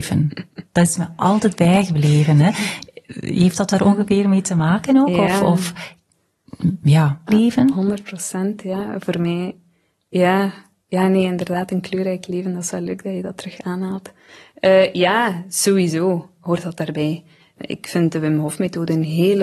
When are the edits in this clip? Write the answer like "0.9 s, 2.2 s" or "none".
7.3 s